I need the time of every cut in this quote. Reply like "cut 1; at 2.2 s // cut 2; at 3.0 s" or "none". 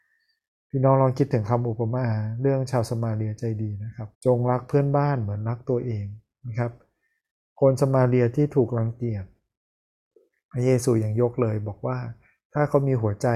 cut 1; at 4.1 s